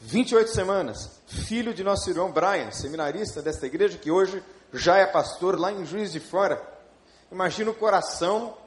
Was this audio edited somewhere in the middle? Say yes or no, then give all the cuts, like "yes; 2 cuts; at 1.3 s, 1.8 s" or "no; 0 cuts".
yes; 1 cut; at 1.2 s